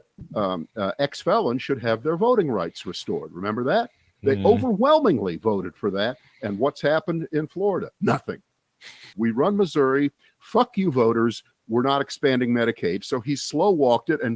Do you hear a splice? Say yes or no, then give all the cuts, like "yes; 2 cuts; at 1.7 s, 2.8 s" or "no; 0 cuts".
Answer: yes; 1 cut; at 9.1 s